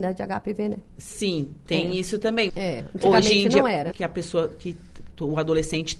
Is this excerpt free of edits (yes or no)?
no